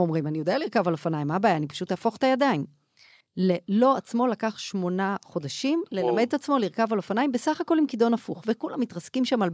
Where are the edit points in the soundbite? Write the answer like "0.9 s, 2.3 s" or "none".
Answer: 3.2 s